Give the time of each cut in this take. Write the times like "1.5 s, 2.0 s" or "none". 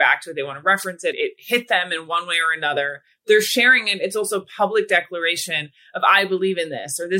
none